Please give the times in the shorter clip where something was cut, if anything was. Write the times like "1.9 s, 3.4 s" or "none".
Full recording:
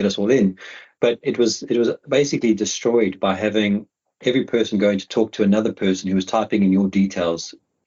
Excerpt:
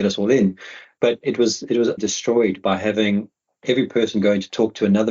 2.0 s